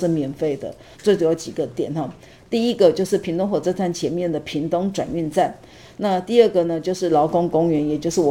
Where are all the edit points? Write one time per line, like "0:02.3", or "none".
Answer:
0:00.9

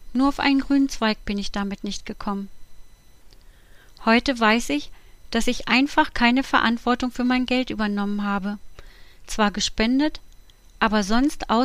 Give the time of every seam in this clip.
none

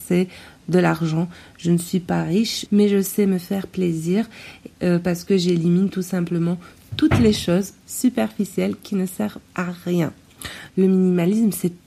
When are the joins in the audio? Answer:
0:10.7

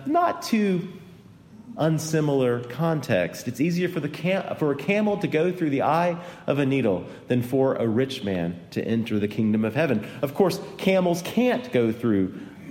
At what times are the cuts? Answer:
none

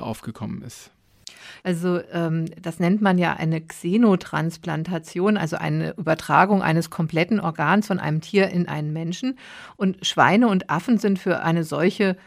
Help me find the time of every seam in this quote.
0:01.6

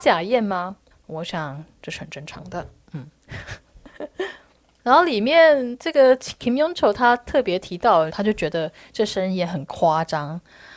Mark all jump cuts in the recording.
0:00.9
0:08.1

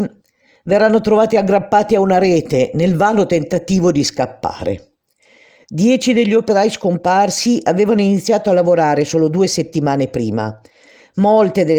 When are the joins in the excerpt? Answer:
none

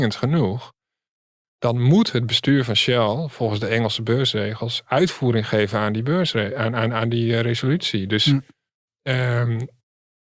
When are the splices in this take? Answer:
none

